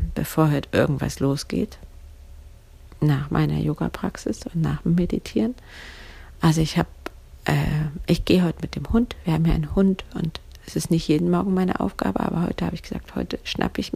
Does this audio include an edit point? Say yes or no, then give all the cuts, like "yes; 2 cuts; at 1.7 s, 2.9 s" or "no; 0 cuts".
yes; 1 cut; at 6.3 s